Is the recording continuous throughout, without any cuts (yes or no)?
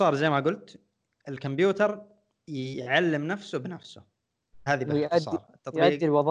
no